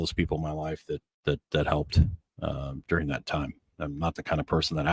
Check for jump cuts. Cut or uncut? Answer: uncut